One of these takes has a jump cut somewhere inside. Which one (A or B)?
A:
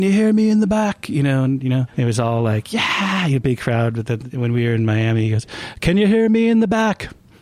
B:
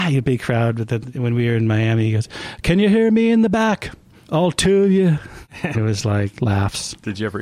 B